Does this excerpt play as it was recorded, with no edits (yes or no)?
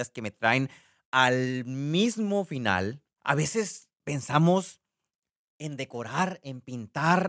no